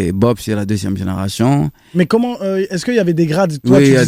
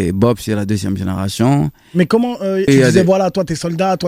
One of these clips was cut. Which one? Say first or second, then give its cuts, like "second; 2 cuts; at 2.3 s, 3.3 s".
second; 1 cut; at 2.7 s